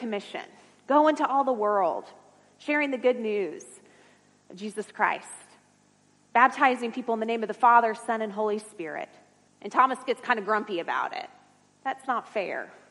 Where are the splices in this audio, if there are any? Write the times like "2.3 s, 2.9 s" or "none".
9.5 s, 11.7 s